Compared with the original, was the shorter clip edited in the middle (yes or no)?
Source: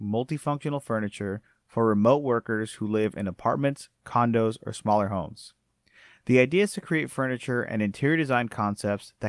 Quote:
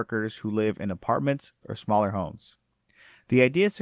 yes